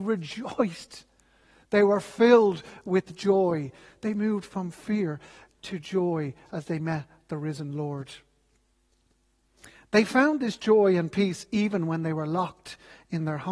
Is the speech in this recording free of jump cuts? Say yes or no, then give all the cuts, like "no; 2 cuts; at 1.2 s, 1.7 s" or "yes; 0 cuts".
yes; 0 cuts